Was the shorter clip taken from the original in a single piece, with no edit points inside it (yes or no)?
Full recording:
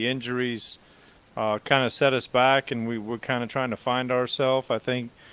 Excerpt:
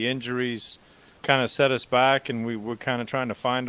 no